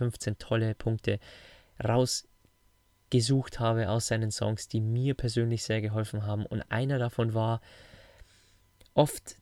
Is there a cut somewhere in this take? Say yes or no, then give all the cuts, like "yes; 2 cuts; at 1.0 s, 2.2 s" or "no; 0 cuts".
no; 0 cuts